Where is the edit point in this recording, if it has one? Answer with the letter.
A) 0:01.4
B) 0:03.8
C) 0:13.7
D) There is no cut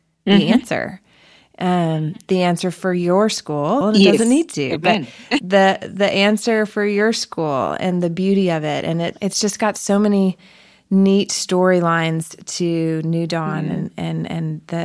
B